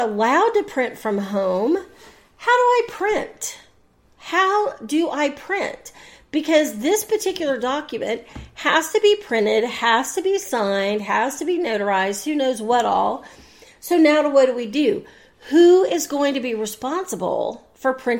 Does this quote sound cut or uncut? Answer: uncut